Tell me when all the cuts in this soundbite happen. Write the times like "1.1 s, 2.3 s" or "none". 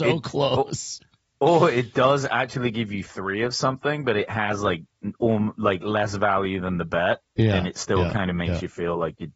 none